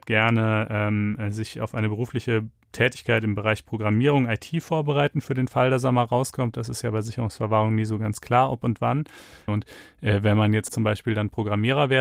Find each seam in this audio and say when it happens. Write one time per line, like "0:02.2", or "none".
0:09.5
0:10.7